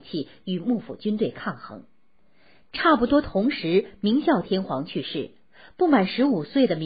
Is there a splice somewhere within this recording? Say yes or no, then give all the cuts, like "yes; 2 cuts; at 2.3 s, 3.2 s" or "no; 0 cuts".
no; 0 cuts